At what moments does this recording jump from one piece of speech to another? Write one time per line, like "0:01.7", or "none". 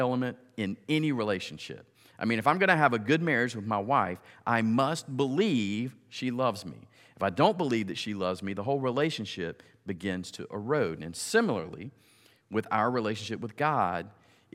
none